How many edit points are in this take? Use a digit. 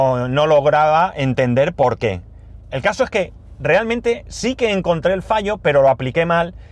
1